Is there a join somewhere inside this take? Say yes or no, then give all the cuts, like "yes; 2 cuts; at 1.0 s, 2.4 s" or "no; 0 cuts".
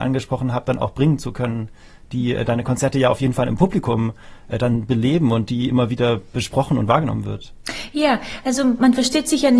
no; 0 cuts